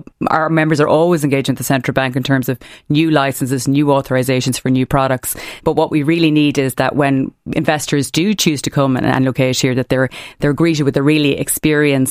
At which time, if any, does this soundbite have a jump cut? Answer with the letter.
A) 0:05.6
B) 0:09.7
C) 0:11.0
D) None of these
A